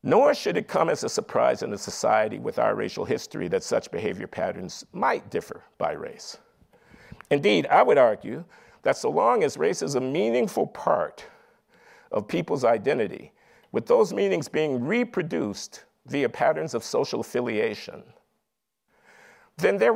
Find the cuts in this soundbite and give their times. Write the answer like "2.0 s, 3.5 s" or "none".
none